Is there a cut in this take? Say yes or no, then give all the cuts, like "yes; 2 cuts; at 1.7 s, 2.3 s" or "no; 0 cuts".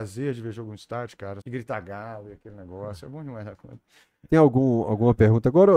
yes; 1 cut; at 1.4 s